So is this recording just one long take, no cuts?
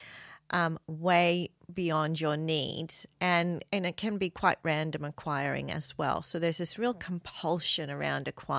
yes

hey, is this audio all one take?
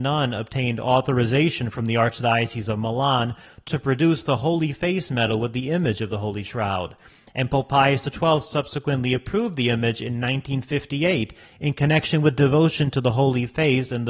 yes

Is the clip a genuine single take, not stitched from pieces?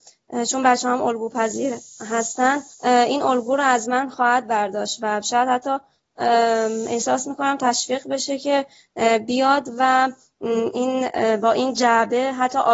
no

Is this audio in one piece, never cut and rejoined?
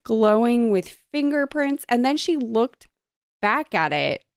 yes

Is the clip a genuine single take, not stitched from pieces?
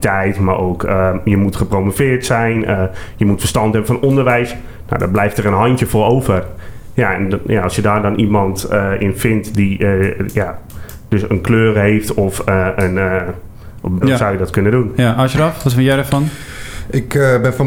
no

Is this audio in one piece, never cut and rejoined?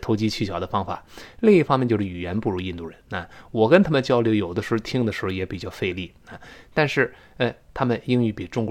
no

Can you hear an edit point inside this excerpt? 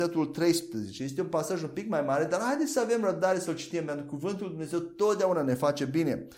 no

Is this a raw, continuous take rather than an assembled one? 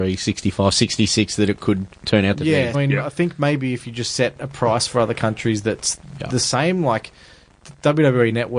no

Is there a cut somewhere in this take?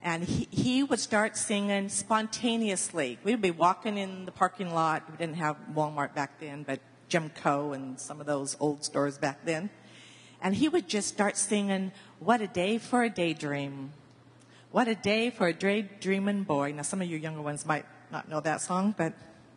no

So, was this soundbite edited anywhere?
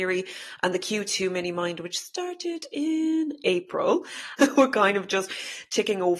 yes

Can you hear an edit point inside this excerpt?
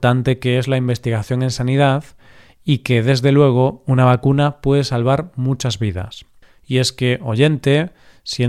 no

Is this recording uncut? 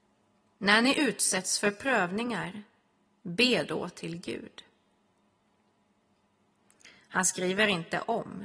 yes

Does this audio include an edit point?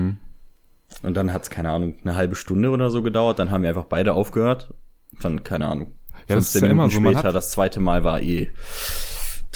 no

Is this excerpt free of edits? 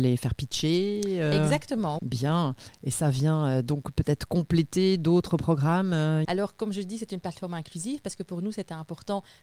no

